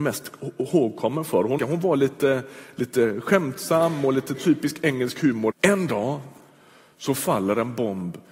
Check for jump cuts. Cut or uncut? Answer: cut